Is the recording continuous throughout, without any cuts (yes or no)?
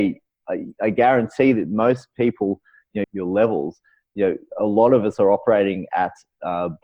no